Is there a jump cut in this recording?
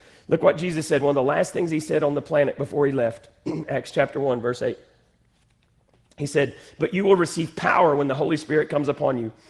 no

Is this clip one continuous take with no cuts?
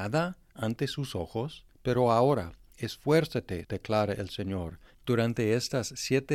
no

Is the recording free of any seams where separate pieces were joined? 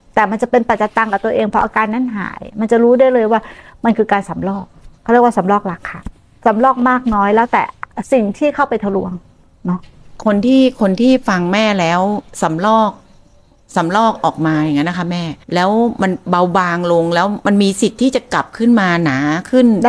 no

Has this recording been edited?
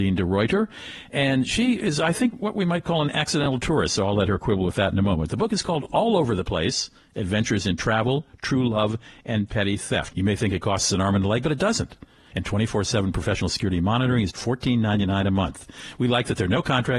yes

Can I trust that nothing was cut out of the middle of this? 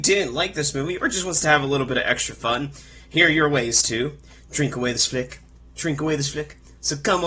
yes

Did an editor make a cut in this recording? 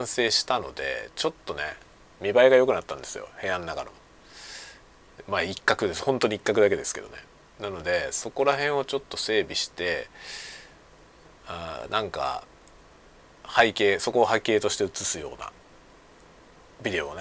no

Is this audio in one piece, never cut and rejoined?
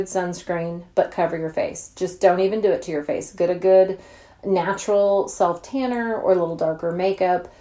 yes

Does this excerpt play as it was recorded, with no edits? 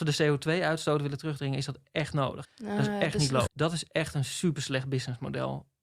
no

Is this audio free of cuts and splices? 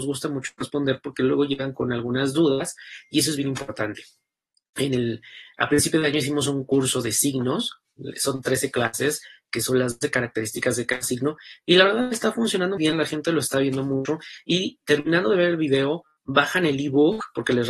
no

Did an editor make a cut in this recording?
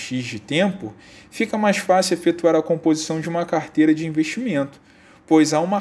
no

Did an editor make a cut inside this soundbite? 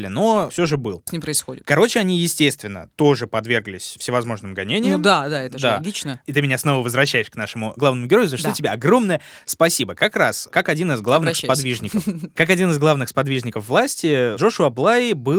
yes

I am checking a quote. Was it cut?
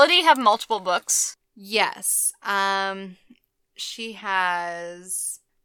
no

